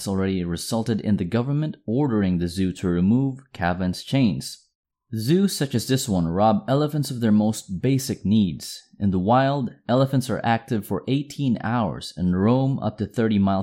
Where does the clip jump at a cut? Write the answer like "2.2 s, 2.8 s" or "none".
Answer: none